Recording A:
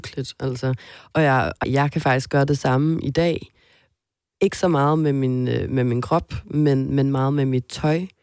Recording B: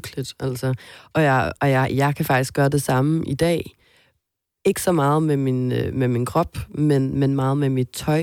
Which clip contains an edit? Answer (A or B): A